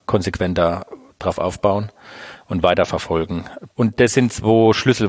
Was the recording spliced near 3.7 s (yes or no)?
yes